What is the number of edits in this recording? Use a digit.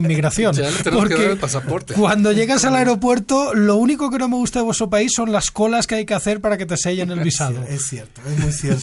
0